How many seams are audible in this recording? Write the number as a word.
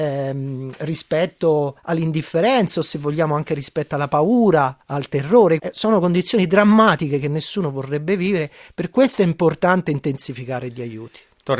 one